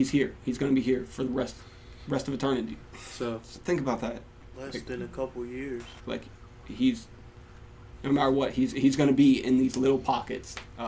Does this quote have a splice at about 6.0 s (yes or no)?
yes